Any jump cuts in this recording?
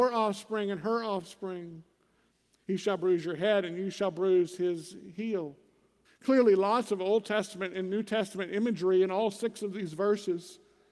yes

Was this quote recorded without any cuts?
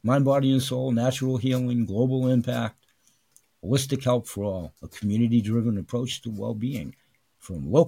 yes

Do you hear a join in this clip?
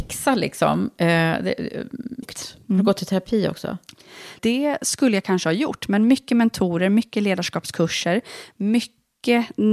yes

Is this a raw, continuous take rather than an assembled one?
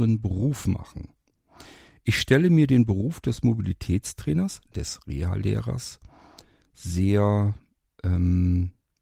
yes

